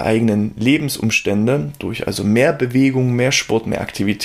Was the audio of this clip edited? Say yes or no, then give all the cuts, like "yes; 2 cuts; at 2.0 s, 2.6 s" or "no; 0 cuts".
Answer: no; 0 cuts